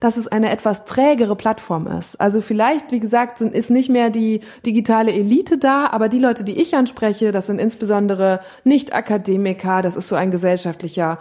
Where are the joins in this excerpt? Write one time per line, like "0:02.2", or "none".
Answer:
none